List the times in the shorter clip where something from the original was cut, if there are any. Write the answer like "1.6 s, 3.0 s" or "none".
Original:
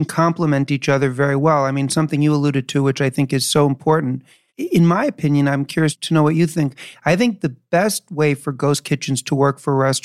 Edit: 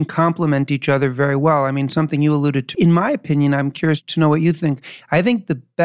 2.7 s